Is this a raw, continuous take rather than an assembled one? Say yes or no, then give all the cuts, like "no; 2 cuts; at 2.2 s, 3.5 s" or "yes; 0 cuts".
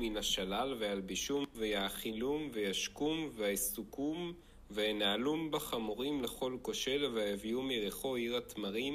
no; 1 cut; at 1.5 s